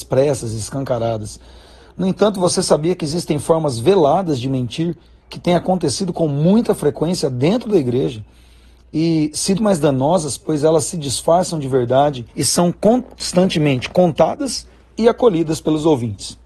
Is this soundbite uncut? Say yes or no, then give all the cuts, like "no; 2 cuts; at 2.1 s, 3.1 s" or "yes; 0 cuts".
no; 2 cuts; at 9.6 s, 12.3 s